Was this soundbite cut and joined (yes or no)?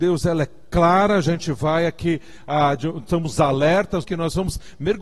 yes